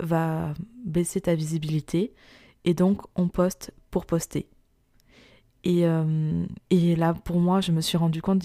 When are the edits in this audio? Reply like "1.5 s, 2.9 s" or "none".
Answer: 6.7 s